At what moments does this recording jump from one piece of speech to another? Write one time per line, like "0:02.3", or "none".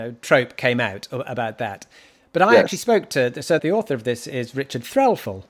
0:03.6

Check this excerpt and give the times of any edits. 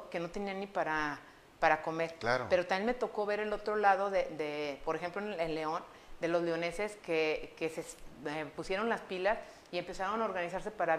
none

